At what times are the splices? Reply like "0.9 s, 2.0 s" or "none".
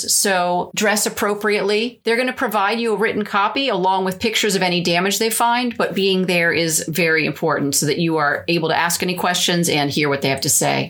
2.0 s